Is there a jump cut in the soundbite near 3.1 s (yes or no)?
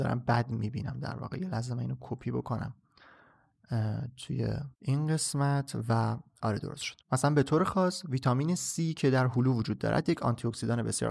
no